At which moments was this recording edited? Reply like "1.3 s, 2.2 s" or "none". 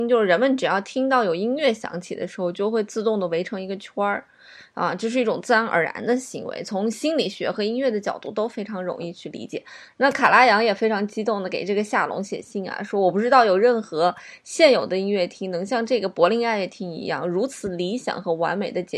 9.9 s